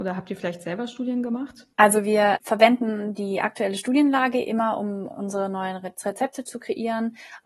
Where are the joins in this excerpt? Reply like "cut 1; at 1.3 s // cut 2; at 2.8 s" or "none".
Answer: cut 1; at 1.7 s

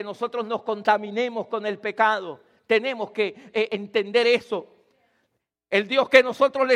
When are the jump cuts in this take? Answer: cut 1; at 3.7 s

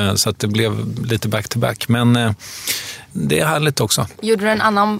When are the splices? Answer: cut 1; at 3.1 s

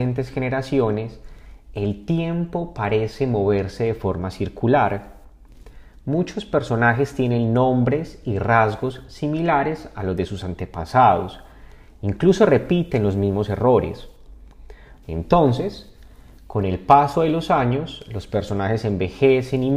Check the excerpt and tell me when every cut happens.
cut 1; at 15.0 s

